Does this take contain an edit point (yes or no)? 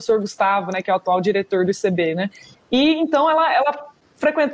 yes